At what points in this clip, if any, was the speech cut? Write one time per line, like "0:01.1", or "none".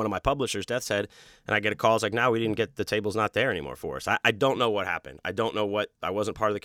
none

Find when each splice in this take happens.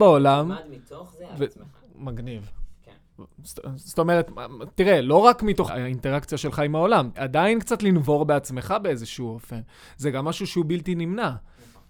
0:05.7
0:07.1

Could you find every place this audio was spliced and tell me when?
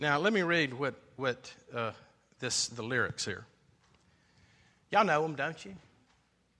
none

